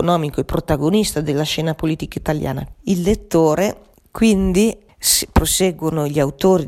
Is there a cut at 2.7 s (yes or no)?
yes